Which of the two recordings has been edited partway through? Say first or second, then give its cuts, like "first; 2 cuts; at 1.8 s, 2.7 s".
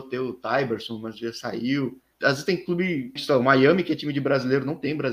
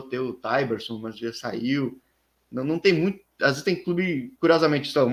first; 2 cuts; at 2.1 s, 3.2 s